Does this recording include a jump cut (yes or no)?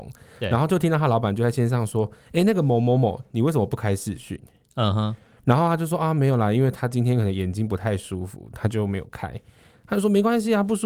no